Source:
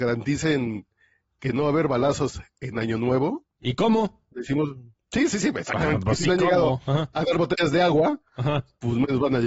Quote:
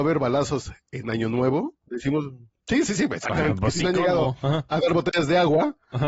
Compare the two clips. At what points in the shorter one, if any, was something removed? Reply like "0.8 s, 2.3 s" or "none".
1.8 s